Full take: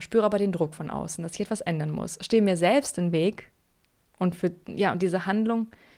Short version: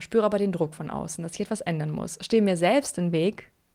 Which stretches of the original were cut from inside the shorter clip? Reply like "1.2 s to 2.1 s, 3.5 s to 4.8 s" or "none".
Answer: none